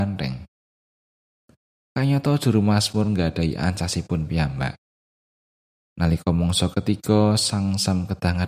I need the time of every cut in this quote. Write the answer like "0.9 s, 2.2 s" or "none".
none